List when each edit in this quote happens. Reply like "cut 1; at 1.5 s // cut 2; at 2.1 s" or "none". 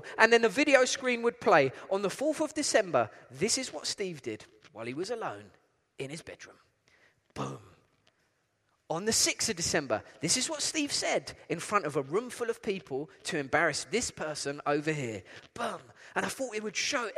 none